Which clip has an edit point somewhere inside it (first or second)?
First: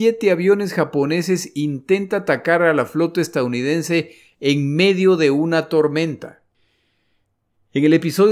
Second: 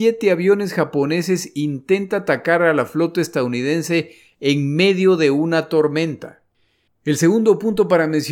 second